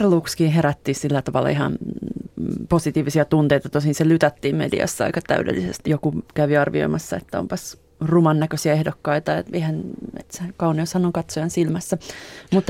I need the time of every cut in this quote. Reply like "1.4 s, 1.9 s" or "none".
5.8 s, 10.2 s